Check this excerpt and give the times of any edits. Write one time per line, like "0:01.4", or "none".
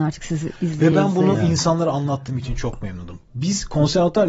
none